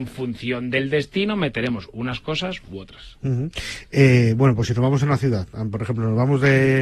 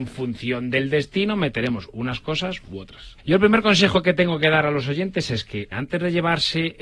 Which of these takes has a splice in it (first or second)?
second